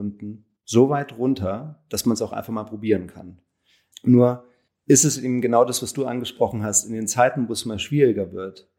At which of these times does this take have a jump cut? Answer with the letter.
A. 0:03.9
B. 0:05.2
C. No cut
A